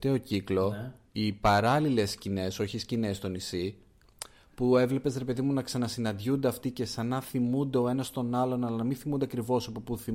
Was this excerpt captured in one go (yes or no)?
yes